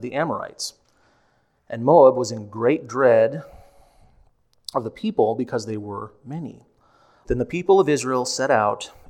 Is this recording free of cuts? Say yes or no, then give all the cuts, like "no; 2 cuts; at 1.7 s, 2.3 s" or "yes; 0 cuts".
no; 1 cut; at 7.2 s